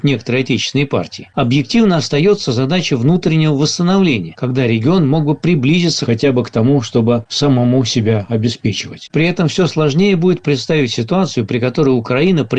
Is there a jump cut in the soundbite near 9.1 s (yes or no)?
yes